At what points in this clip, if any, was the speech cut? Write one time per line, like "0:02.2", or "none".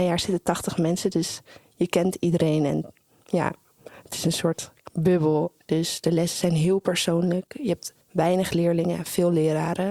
0:05.6
0:08.0